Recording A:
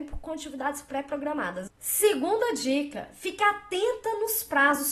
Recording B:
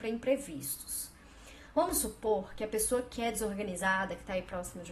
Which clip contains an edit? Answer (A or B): A